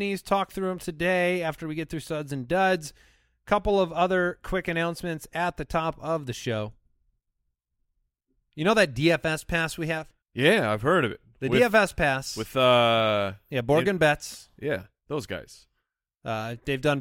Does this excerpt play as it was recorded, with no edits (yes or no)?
no